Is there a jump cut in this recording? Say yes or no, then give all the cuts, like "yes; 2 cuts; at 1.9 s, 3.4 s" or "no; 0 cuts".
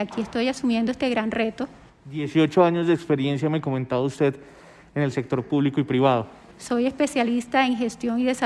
yes; 1 cut; at 6.5 s